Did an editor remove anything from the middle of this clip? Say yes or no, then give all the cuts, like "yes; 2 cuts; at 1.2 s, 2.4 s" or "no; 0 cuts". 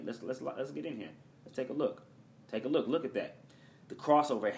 no; 0 cuts